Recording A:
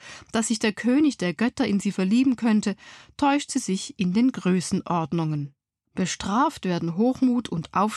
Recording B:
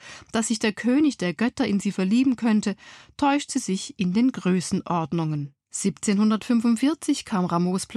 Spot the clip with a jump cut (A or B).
B